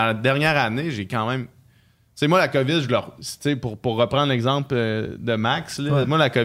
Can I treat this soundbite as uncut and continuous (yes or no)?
yes